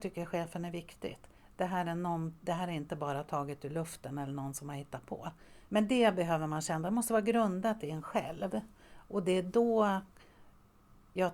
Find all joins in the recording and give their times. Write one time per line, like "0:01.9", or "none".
0:05.7